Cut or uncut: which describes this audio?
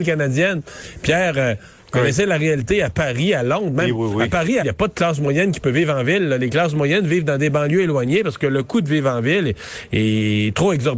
cut